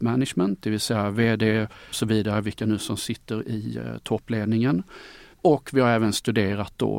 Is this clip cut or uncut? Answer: cut